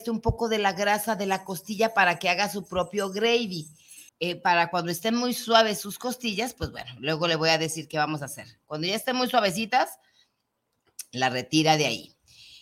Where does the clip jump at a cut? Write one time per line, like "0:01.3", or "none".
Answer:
0:04.1